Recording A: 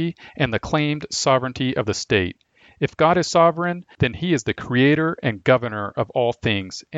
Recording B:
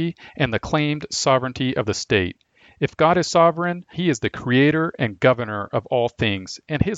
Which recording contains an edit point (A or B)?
B